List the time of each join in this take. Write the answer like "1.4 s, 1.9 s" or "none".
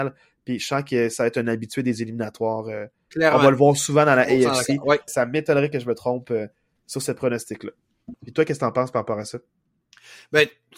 5.1 s, 8.1 s